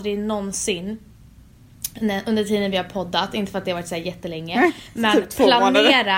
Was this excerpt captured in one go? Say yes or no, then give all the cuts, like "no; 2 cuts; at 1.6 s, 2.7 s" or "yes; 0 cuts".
yes; 0 cuts